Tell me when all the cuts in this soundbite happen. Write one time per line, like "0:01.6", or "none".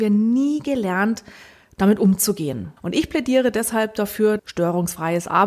0:02.8
0:04.4